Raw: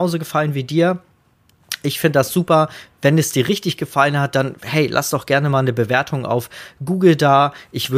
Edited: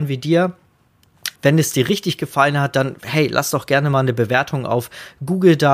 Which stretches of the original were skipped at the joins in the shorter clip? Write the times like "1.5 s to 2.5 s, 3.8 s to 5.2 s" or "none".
1.8 s to 2.9 s